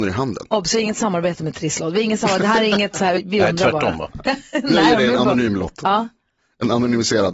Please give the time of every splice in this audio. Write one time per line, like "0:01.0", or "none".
0:03.2